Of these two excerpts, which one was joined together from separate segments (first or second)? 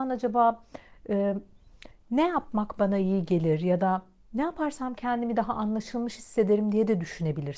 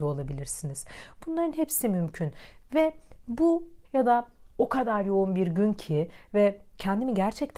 second